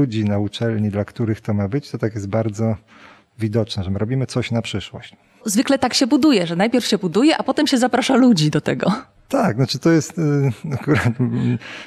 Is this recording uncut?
yes; 0 cuts

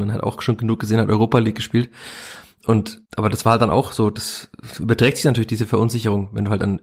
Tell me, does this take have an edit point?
yes; 1 cut; at 3.0 s

